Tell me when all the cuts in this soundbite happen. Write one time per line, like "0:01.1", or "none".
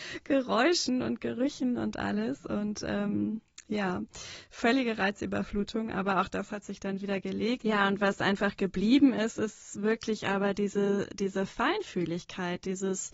none